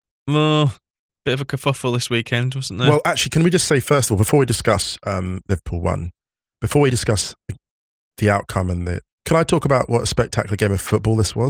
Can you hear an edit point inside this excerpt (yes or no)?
yes